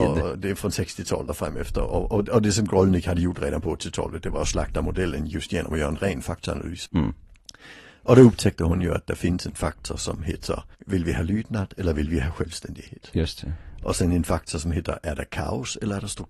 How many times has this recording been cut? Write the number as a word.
two